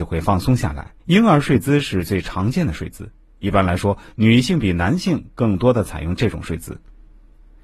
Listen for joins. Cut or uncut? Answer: cut